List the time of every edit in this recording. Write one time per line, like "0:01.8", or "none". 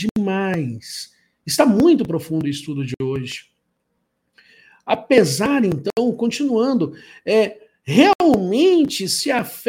none

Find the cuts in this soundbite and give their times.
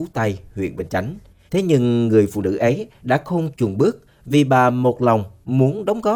0:01.5

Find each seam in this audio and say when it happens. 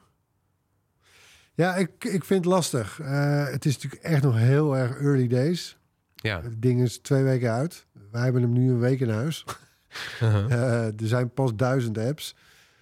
none

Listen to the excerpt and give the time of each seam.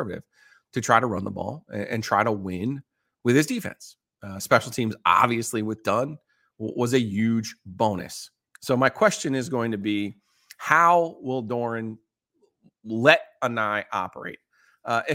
none

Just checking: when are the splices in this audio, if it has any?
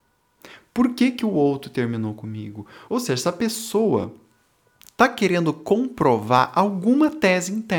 0:02.9

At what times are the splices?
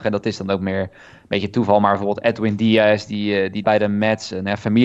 0:03.6

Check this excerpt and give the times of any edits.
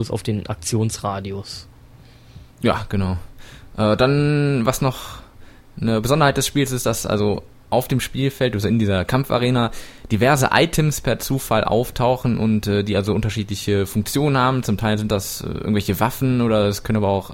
0:02.5

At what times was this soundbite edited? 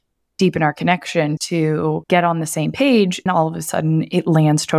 0:01.4
0:03.3

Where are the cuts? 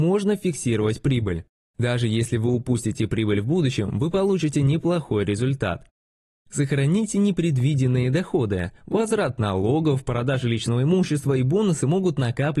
none

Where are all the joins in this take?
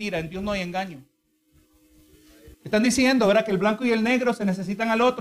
0:02.5

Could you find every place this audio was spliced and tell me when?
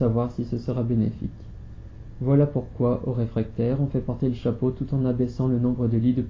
none

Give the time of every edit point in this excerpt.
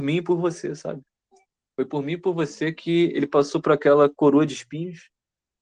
none

